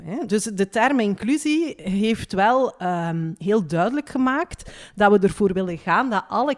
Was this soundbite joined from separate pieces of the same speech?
no; 0 cuts

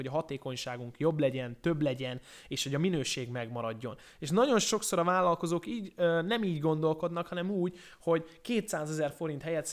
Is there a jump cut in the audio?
no; 0 cuts

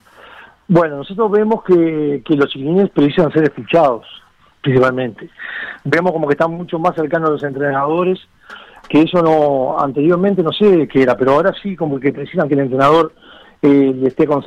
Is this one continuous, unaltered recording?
yes; 0 cuts

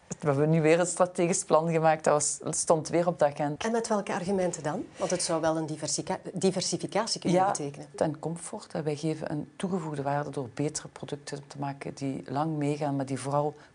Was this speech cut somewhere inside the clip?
yes; 2 cuts; at 3.6 s, 7.9 s

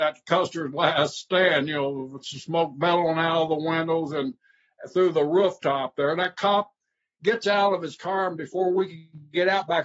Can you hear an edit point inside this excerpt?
no; 0 cuts

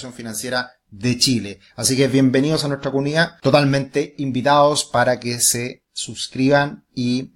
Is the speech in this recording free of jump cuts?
no; 1 cut; at 1.7 s

